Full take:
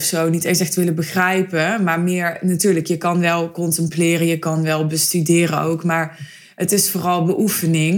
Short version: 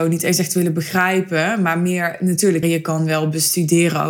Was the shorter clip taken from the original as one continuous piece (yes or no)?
no